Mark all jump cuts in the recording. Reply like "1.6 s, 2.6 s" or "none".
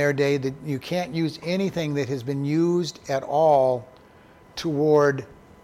none